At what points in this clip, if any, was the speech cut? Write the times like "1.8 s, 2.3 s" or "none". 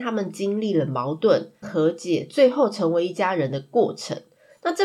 1.6 s

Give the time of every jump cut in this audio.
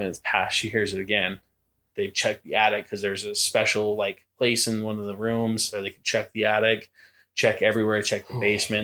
1.9 s

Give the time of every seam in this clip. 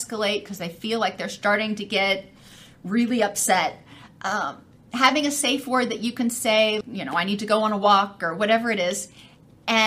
6.8 s

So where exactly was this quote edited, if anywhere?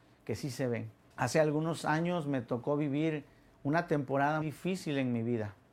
1.1 s, 4.4 s

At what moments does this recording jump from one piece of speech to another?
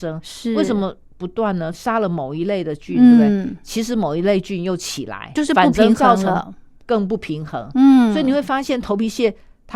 1.7 s, 5.3 s

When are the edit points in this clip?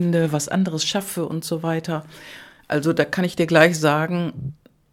none

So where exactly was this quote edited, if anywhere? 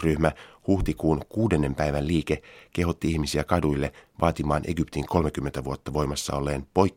none

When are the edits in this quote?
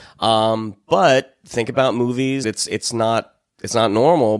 2.4 s

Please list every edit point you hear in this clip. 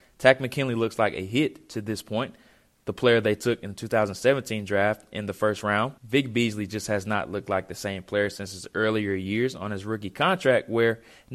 6.0 s

